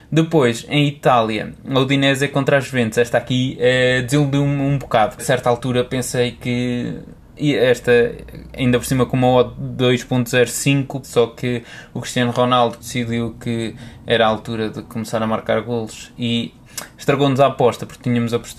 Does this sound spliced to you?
yes; 3 cuts; at 5.2 s, 11.0 s, 12.8 s

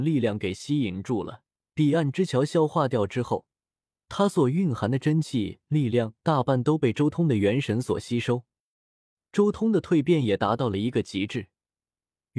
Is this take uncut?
no; 2 cuts; at 1.6 s, 9.2 s

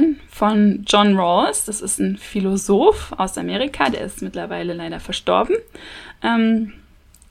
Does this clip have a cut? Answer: no; 0 cuts

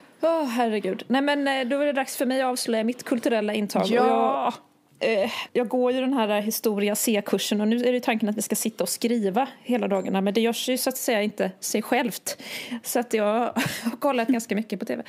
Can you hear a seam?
yes; 1 cut; at 5.5 s

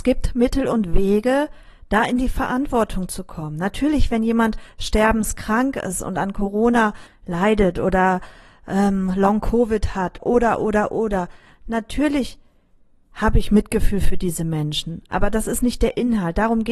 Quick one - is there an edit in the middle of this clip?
no; 0 cuts

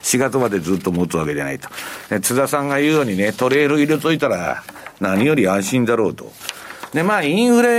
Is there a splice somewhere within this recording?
no; 0 cuts

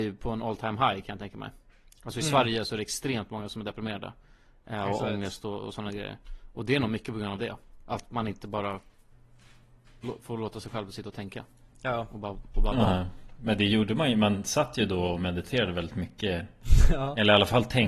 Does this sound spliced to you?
no; 0 cuts

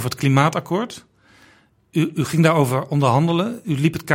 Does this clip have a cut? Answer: no; 0 cuts

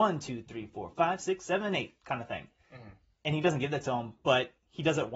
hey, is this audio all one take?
yes; 0 cuts

